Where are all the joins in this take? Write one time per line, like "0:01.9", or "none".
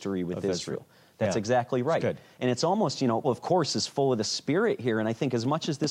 0:03.2